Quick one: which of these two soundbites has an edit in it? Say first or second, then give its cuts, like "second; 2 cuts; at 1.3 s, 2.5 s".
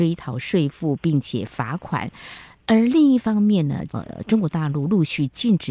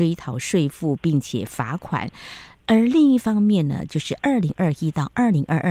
first; 1 cut; at 3.9 s